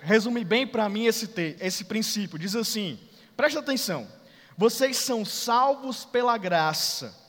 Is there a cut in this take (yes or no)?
yes